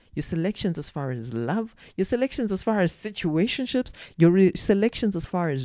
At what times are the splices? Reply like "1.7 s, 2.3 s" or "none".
1.9 s